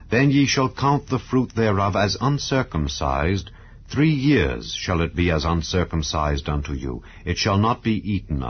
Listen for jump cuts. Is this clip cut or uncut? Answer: uncut